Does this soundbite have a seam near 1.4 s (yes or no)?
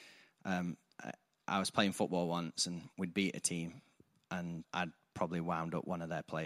no